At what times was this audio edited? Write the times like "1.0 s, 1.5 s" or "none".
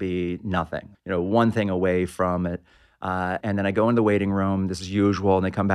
0.9 s, 3.4 s